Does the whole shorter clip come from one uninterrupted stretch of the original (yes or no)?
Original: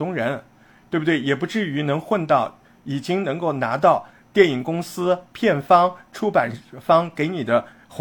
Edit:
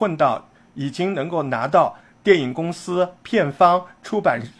yes